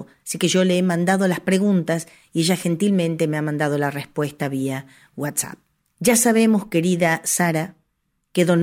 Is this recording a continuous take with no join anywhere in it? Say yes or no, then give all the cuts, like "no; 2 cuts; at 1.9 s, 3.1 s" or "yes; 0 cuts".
no; 1 cut; at 5.8 s